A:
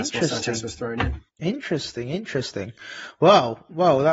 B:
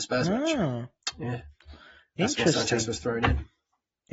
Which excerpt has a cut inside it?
A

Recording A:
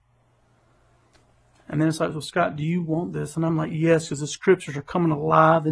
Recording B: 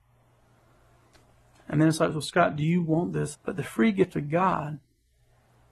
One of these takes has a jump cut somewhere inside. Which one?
B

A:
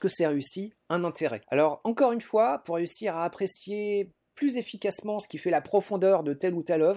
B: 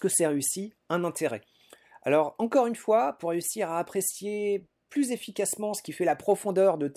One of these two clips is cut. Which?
A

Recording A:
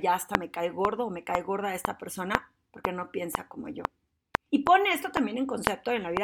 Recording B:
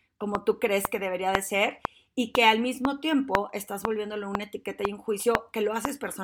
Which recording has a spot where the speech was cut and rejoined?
A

